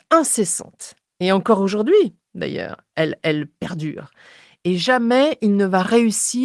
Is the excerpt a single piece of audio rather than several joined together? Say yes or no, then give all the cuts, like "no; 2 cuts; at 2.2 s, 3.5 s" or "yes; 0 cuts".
yes; 0 cuts